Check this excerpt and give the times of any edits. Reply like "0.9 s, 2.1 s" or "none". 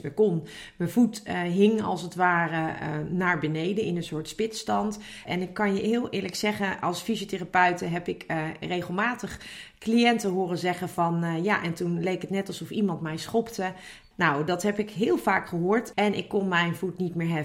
5.3 s, 14.1 s, 15.9 s

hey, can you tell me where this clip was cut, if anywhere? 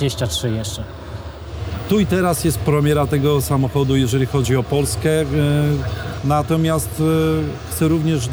6.2 s

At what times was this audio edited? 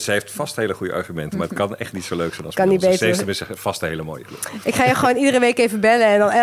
none

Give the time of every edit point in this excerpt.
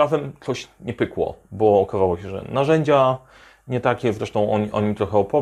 none

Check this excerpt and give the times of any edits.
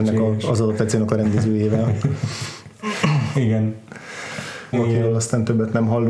4.7 s

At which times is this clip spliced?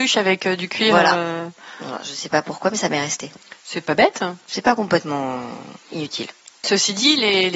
6.6 s

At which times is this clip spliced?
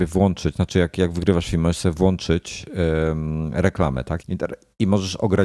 4.2 s

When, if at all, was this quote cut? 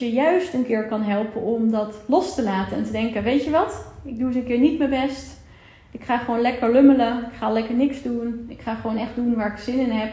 none

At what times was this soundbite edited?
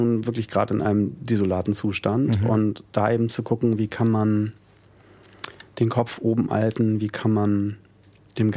none

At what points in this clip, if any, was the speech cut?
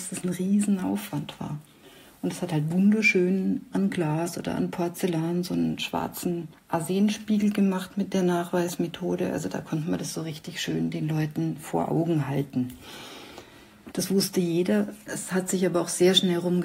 13.9 s

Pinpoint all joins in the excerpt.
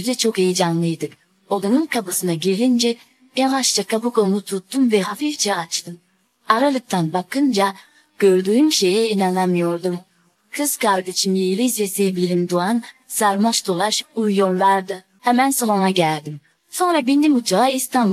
16.6 s

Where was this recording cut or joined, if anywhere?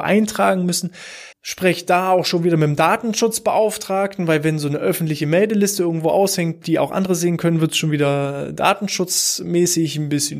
1.3 s

